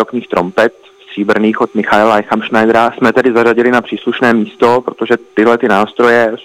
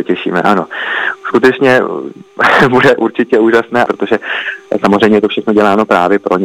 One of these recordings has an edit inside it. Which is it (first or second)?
second